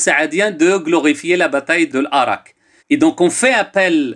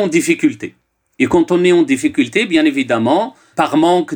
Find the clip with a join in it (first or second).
first